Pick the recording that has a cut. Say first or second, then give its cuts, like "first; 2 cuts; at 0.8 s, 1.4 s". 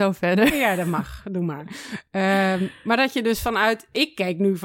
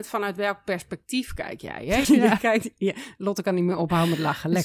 second; 1 cut; at 2.0 s